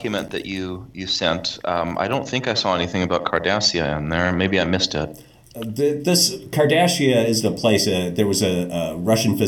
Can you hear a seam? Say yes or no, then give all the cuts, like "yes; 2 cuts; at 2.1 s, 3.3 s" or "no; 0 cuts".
no; 0 cuts